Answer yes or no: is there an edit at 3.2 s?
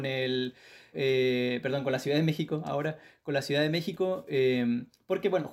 no